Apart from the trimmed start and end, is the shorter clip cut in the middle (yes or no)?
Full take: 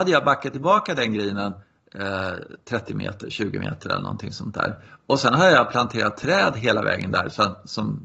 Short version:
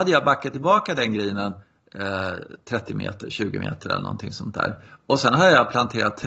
no